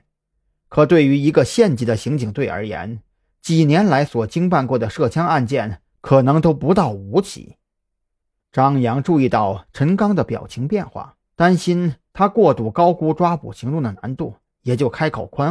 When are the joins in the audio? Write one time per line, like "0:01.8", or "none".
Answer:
0:08.4
0:11.3